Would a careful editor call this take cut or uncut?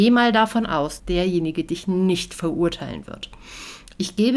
cut